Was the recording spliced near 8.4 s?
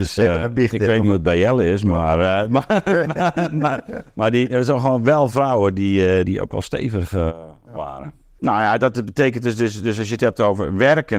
yes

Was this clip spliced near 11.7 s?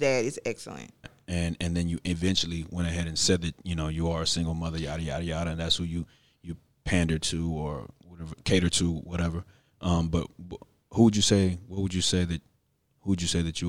no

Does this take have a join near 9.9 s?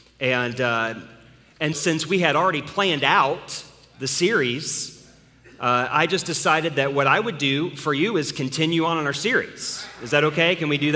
no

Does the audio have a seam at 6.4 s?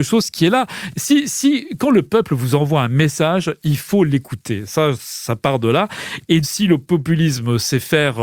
yes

